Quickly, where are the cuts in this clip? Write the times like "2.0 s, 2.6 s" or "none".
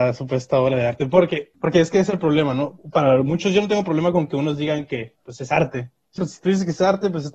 6.2 s